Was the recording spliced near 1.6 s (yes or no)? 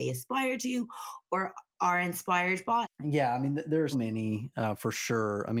no